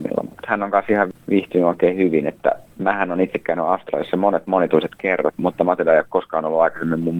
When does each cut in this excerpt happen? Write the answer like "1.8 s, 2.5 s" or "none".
5.4 s